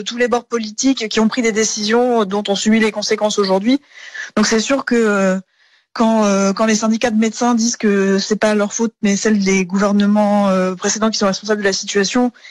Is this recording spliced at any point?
no; 0 cuts

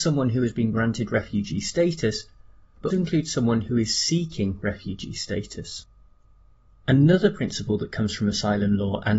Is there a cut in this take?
yes; 1 cut; at 2.9 s

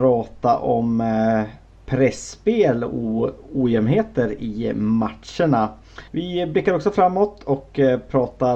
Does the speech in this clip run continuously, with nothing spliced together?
no; 1 cut; at 6.1 s

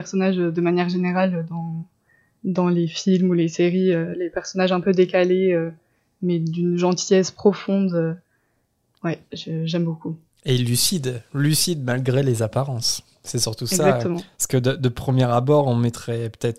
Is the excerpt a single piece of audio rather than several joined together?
yes; 0 cuts

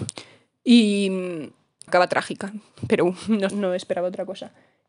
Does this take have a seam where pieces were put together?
yes; 2 cuts; at 1.9 s, 3.5 s

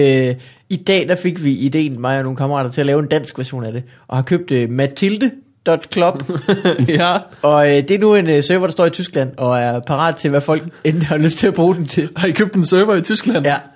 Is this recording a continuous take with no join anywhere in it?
yes; 0 cuts

